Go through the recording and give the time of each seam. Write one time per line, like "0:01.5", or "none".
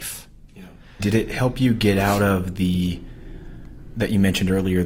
0:01.0